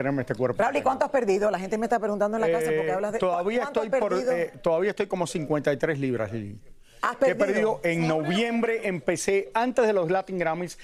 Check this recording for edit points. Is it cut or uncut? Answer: uncut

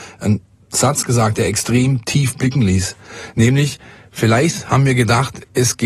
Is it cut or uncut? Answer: uncut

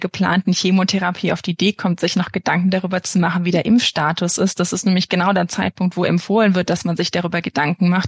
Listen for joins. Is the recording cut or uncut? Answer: uncut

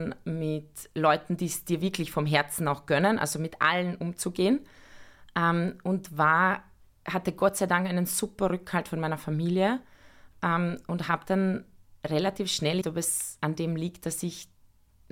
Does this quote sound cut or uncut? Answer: cut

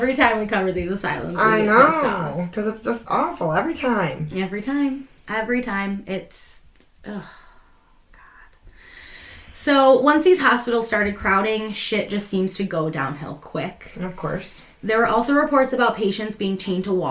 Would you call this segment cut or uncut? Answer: uncut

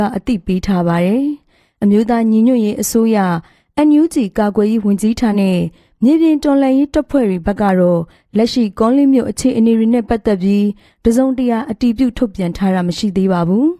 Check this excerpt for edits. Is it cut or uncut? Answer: cut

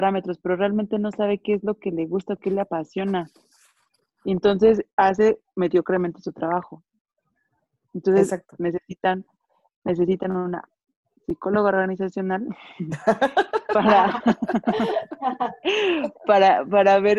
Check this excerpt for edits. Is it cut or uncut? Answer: uncut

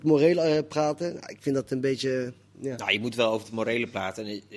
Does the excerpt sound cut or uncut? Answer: uncut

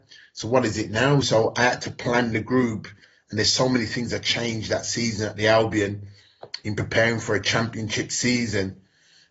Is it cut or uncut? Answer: cut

